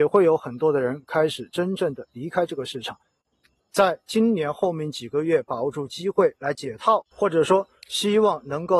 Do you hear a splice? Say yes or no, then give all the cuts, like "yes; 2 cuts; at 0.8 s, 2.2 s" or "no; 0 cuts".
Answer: yes; 2 cuts; at 3.6 s, 7.1 s